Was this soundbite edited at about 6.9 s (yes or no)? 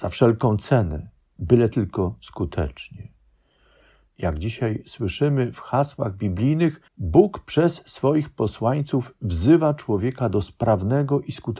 yes